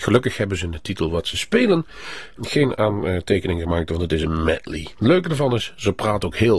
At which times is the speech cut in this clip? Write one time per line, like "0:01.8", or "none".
0:02.4
0:04.9